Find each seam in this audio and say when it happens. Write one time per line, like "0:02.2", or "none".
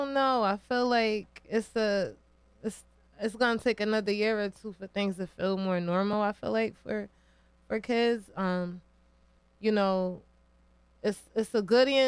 none